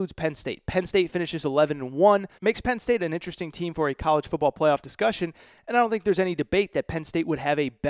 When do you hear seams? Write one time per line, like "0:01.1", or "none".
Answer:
0:02.3

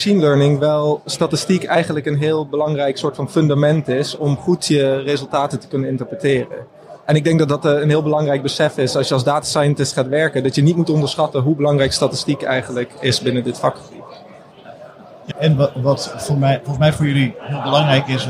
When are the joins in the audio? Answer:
0:15.3

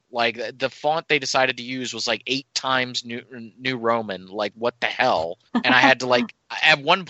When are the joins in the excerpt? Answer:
0:05.5

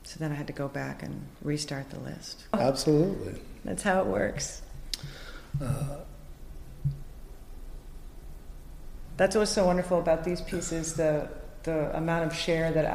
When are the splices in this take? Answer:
0:02.5

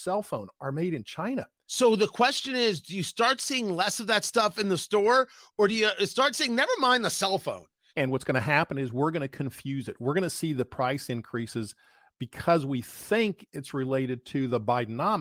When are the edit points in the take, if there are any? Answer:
0:07.9

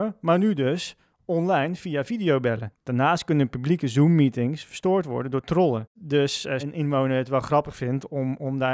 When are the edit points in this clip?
0:06.6

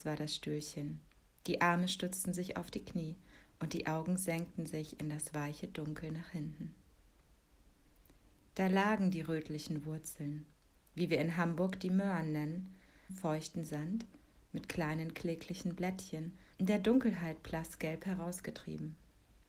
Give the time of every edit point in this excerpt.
0:13.1
0:16.5

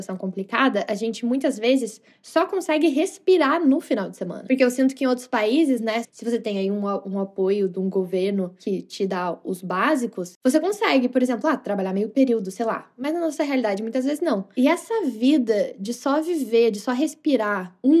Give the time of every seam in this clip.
0:06.0

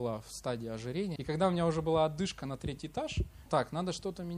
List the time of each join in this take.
0:01.2
0:03.5

